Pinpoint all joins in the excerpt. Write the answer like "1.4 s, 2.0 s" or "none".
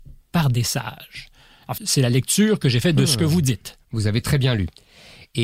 1.8 s